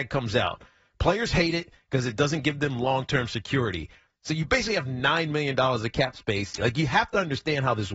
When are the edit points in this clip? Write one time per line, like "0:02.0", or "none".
0:04.1
0:06.6